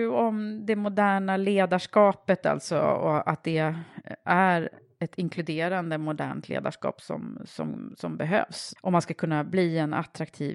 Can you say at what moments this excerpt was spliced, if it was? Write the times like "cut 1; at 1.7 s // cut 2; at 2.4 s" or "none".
cut 1; at 8.8 s